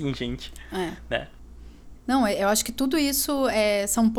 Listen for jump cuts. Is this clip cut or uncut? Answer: cut